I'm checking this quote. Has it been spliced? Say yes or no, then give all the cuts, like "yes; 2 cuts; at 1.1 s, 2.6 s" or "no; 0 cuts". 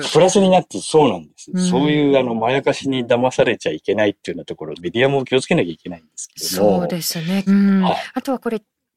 yes; 2 cuts; at 4.8 s, 7.5 s